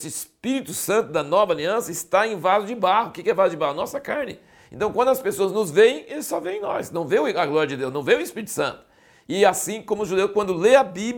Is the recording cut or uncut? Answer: uncut